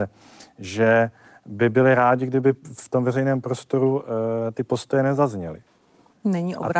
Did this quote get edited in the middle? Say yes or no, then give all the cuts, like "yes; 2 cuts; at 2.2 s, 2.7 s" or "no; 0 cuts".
no; 0 cuts